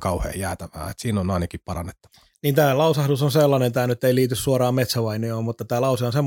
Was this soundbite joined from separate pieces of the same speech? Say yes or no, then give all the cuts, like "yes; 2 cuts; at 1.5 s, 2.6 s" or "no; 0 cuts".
no; 0 cuts